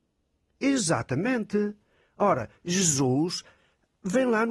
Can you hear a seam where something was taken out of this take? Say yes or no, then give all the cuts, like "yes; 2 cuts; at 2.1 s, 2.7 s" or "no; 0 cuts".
no; 0 cuts